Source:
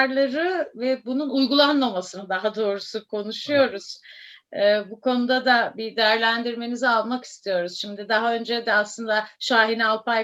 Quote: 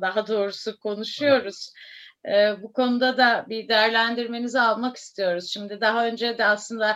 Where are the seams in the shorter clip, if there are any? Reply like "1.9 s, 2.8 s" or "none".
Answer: none

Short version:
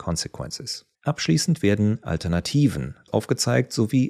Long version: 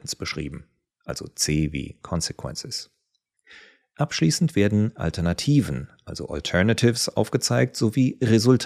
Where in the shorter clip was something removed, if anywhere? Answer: 0.9 s, 3.1 s

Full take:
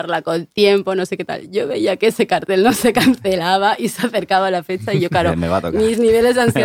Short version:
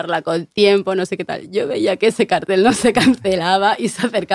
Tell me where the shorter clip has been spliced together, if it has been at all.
none

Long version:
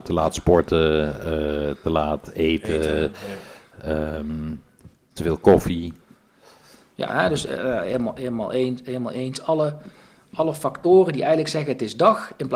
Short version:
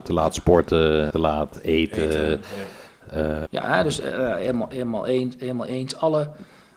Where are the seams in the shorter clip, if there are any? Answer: 1.1 s, 3.5 s

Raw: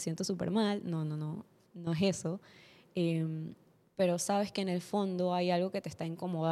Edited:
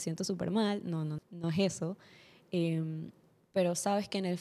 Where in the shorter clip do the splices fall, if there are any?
1.2 s

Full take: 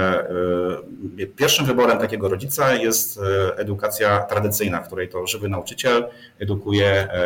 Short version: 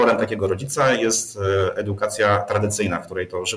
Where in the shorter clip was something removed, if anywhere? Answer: none

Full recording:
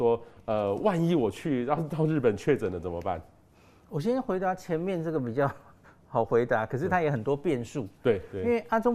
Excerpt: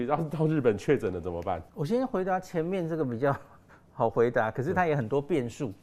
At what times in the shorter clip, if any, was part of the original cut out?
1.7 s

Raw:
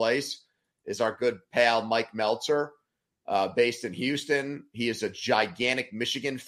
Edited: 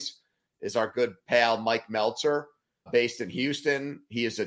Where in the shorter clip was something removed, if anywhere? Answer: 2.9 s

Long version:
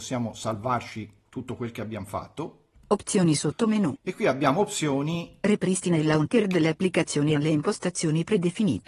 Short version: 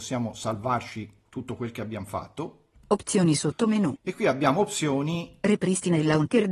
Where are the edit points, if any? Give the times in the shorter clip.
none

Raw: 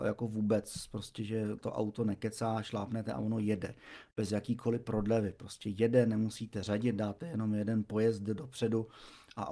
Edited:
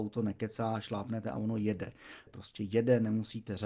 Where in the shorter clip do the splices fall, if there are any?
2.3 s

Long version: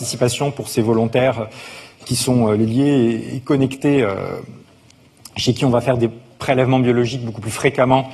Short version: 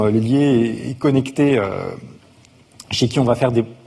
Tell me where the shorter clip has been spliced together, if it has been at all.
none

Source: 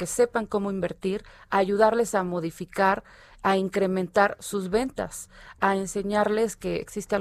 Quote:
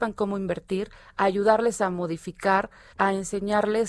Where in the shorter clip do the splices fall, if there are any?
2.9 s

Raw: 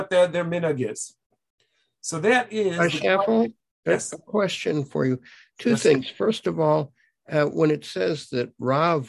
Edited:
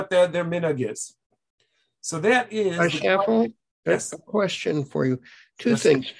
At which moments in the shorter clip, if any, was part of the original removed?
none

